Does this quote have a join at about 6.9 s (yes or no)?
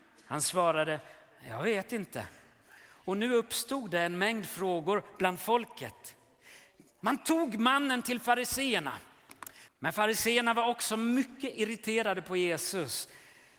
no